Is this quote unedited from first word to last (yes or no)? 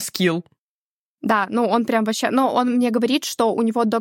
yes